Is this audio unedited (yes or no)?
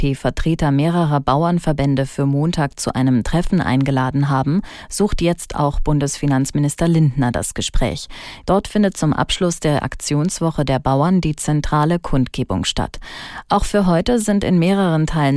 no